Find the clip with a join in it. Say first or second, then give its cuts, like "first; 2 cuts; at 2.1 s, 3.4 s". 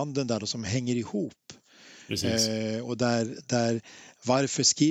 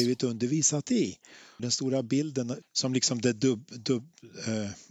second; 2 cuts; at 1.6 s, 2.6 s